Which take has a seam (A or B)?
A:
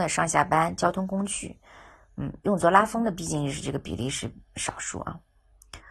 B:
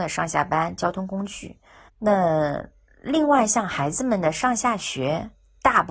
B